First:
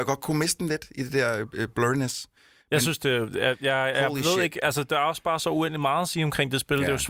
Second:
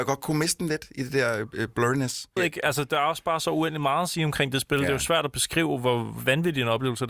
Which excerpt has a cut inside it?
second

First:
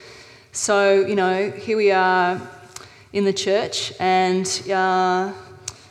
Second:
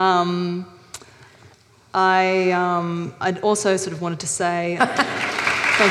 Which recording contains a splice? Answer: second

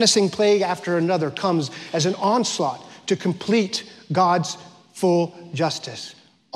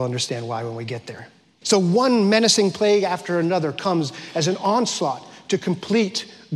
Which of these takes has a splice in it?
second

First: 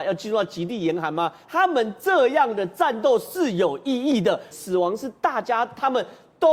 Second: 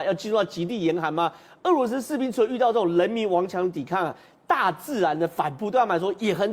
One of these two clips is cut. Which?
first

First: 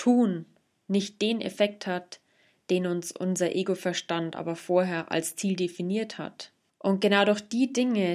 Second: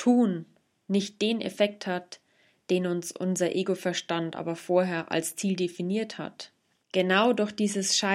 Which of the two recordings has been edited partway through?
first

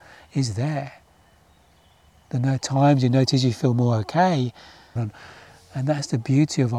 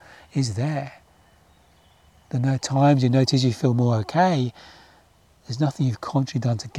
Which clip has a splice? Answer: first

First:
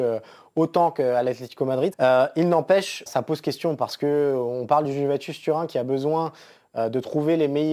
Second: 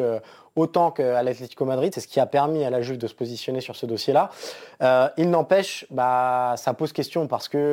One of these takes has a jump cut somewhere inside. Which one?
first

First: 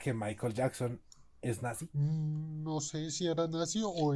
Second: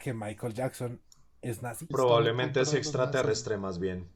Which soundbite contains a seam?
second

